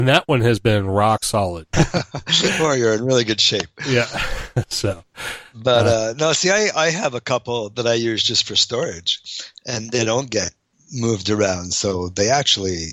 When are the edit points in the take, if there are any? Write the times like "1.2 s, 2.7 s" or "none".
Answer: 1.7 s